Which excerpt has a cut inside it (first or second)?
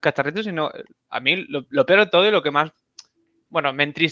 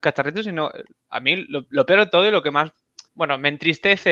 second